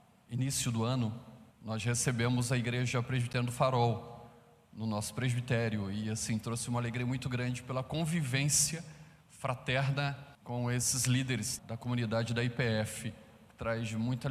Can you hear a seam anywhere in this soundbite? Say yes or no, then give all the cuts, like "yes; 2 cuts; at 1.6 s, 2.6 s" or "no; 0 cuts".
yes; 3 cuts; at 1.5 s, 10.3 s, 11.6 s